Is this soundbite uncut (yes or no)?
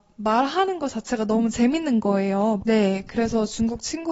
no